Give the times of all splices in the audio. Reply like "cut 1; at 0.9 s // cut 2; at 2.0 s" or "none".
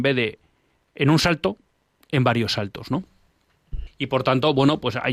cut 1; at 3.9 s